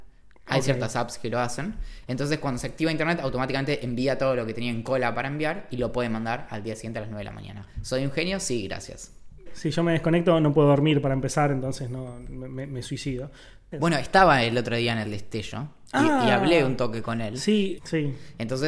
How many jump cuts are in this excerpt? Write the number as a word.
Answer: three